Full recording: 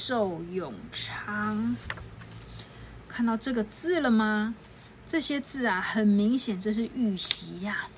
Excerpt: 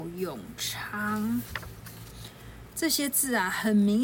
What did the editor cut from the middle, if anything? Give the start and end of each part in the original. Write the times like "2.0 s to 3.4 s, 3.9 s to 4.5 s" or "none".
3.1 s to 5.0 s